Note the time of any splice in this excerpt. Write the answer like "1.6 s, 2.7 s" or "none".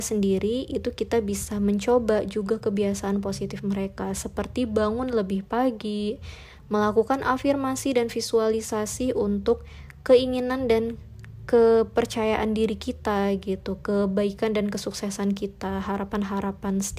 6.6 s